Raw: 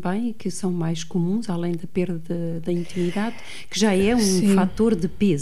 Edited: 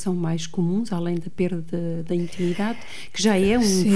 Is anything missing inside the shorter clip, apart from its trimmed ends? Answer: no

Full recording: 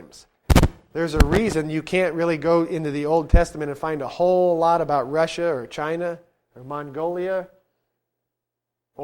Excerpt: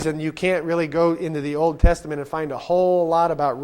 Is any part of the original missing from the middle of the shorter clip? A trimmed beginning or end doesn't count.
no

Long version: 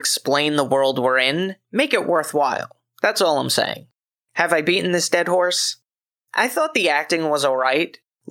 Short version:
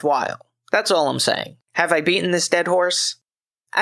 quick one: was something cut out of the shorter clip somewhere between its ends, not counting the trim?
yes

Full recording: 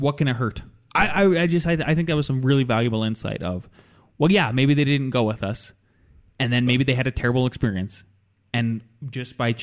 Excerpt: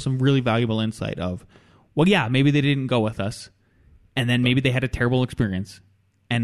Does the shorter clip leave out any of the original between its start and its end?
no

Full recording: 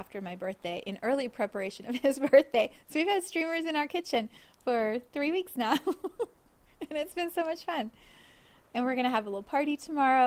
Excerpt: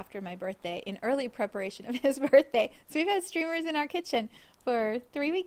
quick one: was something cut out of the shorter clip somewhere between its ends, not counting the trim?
no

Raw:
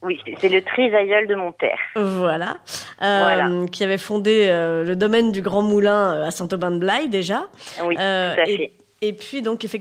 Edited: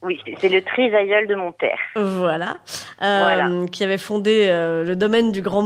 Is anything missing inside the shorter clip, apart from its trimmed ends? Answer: no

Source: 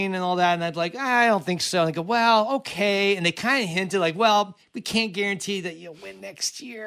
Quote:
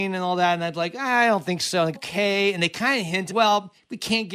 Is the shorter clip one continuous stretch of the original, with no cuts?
no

